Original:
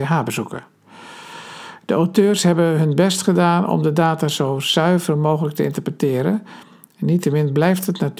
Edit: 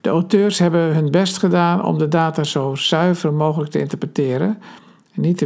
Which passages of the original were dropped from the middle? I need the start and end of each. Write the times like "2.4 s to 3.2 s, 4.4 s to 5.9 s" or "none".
none